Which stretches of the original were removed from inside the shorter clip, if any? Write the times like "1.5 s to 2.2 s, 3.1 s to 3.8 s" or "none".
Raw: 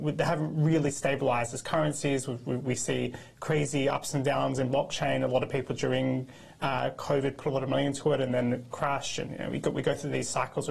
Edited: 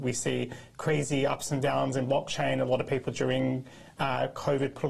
none